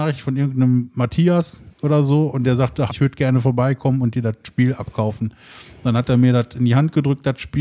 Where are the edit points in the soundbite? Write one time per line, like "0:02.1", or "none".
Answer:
0:02.9